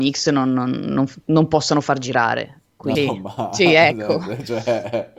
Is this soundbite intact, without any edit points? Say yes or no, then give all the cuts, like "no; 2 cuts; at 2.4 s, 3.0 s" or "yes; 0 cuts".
no; 1 cut; at 3.0 s